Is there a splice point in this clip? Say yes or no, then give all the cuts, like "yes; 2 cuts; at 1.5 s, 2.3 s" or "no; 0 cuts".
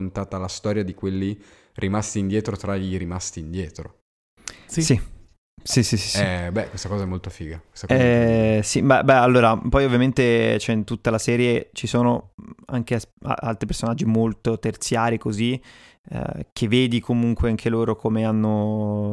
no; 0 cuts